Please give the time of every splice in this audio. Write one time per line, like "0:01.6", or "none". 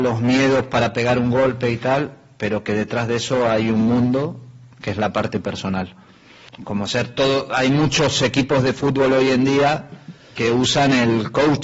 0:06.5
0:10.4